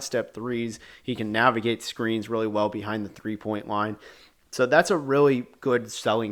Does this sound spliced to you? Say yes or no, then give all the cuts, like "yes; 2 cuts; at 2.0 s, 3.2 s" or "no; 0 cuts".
no; 0 cuts